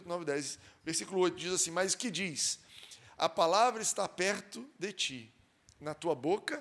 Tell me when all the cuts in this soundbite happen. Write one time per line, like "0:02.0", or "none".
none